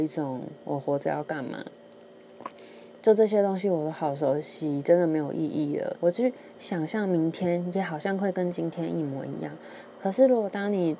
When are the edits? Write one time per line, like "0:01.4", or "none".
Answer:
0:05.9